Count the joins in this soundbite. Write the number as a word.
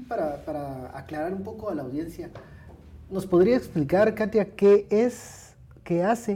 zero